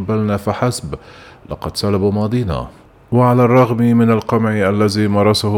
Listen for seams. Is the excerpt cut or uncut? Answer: uncut